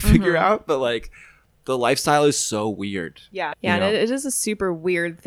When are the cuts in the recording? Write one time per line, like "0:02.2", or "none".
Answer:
0:03.5